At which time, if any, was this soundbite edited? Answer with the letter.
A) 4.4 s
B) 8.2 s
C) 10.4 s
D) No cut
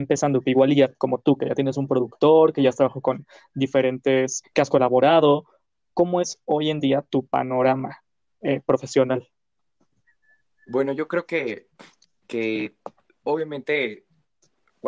A